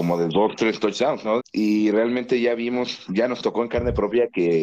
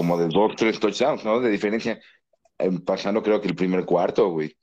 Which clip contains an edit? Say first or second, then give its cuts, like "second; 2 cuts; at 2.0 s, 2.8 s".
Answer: first; 1 cut; at 1.4 s